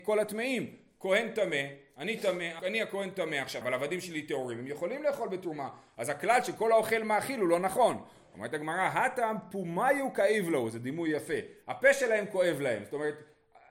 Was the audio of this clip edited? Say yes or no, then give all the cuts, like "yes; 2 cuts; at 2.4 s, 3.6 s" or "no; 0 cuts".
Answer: yes; 2 cuts; at 2.6 s, 3.6 s